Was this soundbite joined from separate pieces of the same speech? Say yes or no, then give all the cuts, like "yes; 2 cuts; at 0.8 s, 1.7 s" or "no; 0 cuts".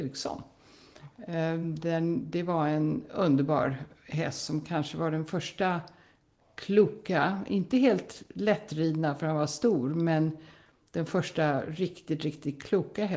no; 0 cuts